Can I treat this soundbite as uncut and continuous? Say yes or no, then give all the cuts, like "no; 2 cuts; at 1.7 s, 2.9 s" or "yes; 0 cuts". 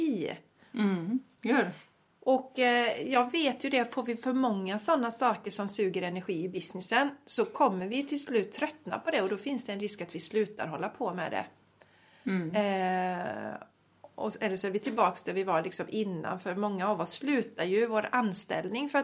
yes; 0 cuts